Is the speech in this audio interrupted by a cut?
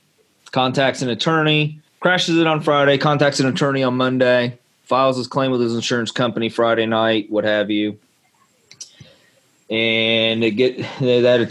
yes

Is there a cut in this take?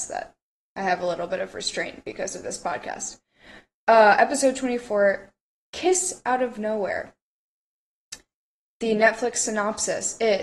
no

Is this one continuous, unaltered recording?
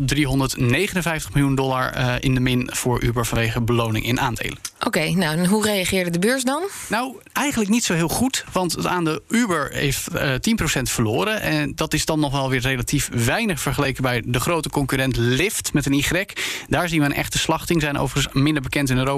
yes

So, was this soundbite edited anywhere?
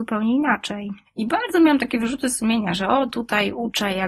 yes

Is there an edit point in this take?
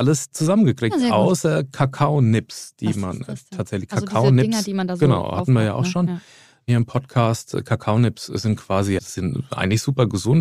yes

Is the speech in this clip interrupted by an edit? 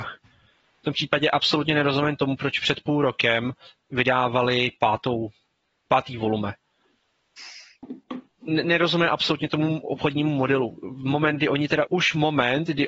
yes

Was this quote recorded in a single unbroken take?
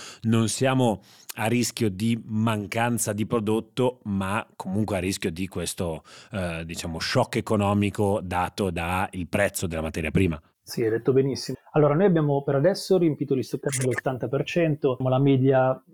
no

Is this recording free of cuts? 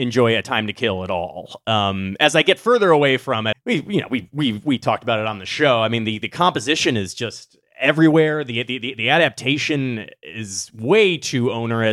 no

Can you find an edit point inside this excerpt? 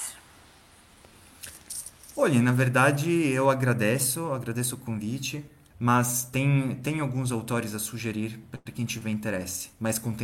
yes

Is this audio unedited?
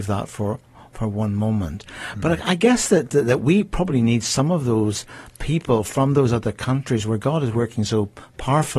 yes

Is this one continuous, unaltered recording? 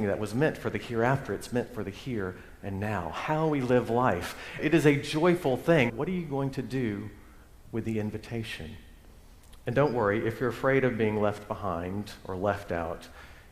no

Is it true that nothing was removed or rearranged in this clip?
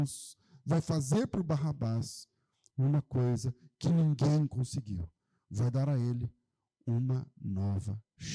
yes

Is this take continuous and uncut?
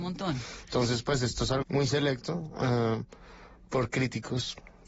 no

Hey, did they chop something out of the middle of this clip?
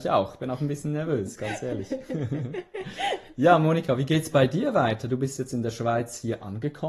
no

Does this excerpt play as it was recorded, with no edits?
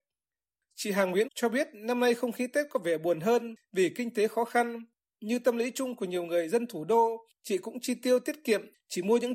no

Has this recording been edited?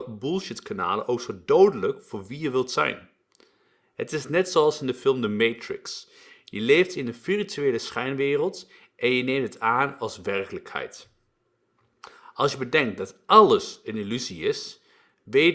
no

